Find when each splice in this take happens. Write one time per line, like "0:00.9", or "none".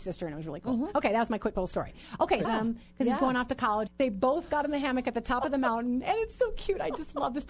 0:02.4
0:03.9